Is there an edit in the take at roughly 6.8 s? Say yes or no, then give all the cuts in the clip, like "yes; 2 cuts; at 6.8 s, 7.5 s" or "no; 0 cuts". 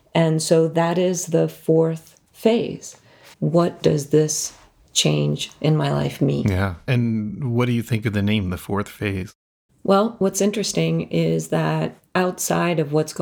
no; 2 cuts; at 3.3 s, 9.7 s